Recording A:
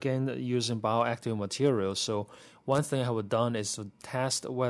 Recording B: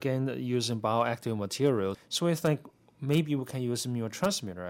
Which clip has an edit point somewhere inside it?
B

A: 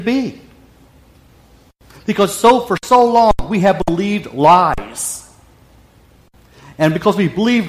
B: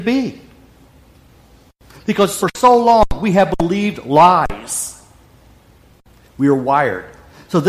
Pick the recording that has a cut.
B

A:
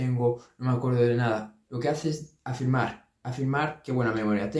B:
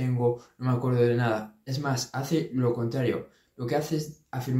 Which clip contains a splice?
A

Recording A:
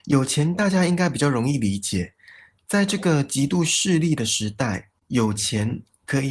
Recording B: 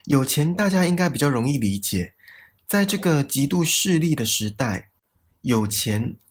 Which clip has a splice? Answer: A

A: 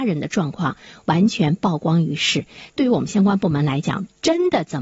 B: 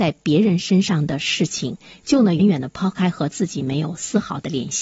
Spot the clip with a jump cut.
B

